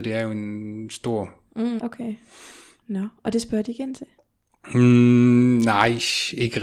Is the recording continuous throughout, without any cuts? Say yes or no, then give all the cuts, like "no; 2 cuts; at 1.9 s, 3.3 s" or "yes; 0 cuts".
no; 1 cut; at 1.8 s